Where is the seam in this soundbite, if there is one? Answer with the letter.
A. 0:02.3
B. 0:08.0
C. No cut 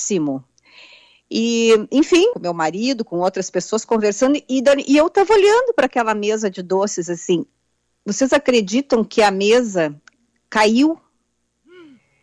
A